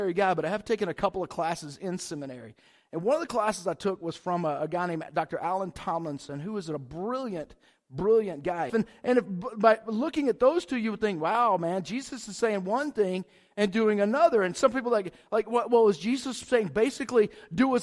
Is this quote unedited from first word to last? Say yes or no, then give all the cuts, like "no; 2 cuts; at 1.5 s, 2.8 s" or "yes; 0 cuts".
no; 1 cut; at 8.7 s